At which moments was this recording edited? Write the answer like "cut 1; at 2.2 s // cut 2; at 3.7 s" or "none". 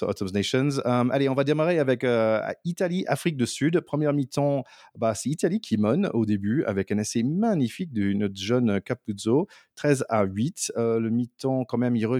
none